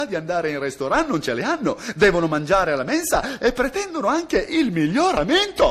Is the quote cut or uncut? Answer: uncut